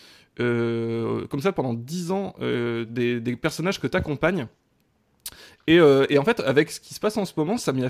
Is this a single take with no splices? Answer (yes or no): yes